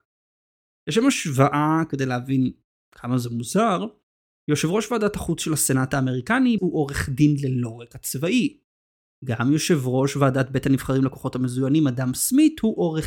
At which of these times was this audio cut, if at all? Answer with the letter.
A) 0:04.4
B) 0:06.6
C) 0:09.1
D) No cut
B